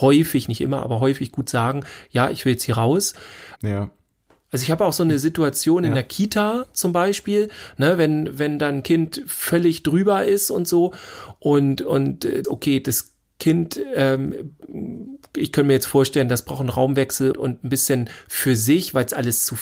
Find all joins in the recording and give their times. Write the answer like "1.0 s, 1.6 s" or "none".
3.6 s, 12.4 s, 17.3 s